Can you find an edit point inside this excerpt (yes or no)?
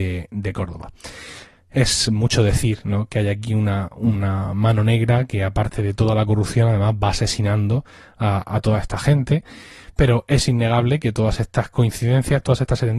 no